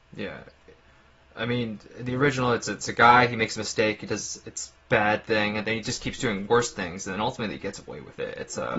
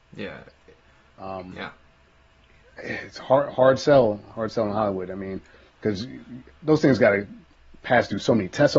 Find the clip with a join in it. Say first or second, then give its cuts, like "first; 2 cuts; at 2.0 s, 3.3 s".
second; 1 cut; at 1.2 s